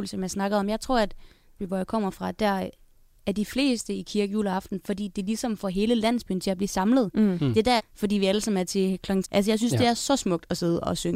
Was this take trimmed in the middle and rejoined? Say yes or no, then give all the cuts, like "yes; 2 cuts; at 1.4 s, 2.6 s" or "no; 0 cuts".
yes; 3 cuts; at 1.6 s, 7.8 s, 9.2 s